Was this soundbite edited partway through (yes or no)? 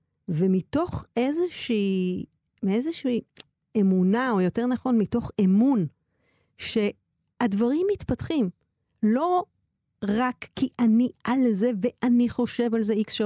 no